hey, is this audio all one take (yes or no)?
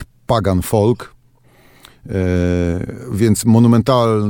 yes